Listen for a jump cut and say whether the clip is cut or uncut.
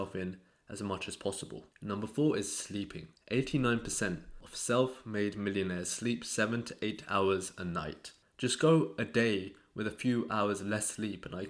cut